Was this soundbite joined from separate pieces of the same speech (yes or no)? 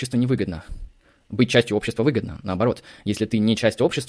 no